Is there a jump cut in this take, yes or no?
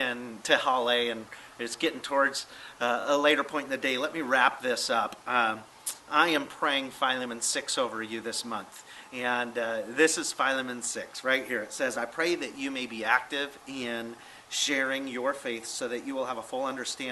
no